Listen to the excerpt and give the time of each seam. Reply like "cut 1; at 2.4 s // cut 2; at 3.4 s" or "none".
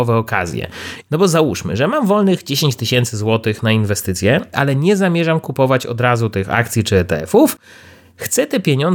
cut 1; at 1.0 s // cut 2; at 4.5 s

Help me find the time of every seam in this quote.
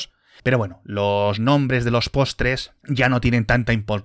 cut 1; at 2.8 s

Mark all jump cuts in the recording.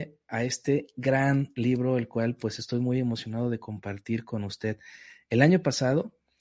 none

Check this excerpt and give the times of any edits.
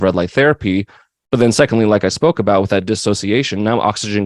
none

